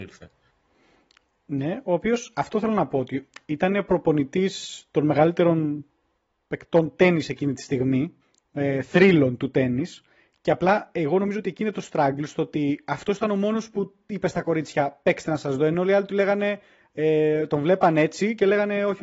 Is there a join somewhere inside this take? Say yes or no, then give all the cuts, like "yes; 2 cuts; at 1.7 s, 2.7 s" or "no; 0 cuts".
no; 0 cuts